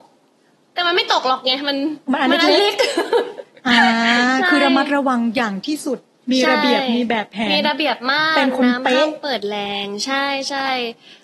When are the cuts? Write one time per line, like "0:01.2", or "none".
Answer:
0:02.0